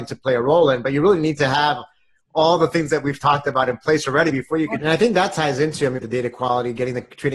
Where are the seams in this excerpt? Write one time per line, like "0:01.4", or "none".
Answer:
0:04.8
0:06.0